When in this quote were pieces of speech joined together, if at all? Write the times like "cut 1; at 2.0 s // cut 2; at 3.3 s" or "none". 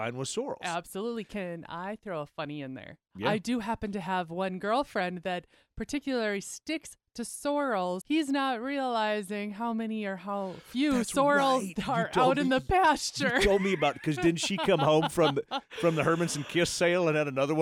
cut 1; at 8.0 s